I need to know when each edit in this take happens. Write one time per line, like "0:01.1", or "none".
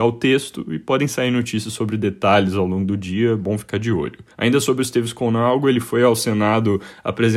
0:04.3